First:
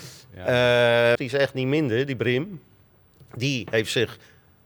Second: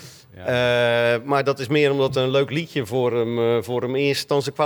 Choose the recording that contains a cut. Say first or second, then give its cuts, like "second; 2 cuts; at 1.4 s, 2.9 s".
first; 1 cut; at 1.1 s